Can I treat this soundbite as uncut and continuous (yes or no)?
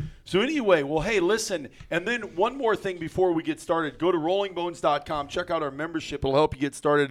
yes